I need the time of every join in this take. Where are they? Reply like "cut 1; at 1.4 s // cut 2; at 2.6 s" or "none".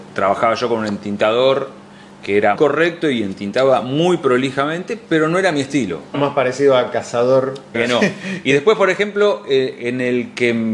cut 1; at 2.5 s // cut 2; at 6.1 s // cut 3; at 7.7 s